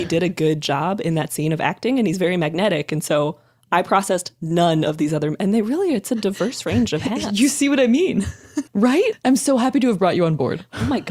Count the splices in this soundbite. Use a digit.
1